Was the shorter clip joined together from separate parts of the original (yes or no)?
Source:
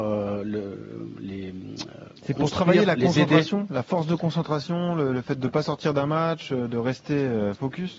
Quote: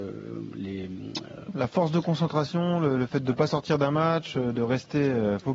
yes